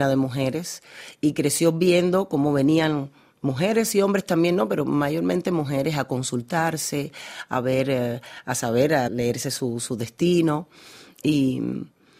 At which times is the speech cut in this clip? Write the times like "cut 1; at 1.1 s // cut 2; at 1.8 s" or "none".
cut 1; at 9.1 s